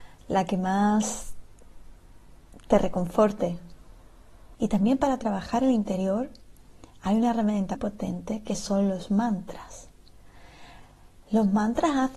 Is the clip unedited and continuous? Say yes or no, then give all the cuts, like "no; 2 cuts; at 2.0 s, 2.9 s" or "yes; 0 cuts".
no; 2 cuts; at 4.5 s, 7.7 s